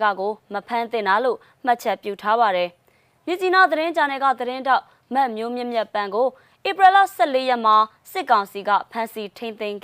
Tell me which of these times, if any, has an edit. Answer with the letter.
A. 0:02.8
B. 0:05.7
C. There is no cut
C